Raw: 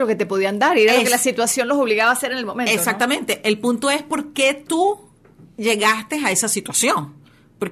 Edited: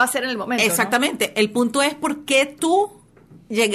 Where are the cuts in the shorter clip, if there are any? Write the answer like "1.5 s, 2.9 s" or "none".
none